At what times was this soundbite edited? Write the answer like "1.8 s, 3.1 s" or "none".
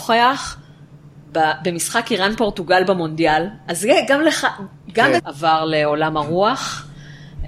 5.2 s